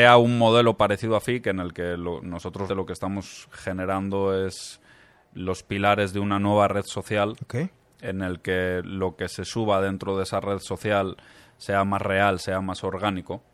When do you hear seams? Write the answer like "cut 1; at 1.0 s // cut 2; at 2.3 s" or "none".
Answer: cut 1; at 2.7 s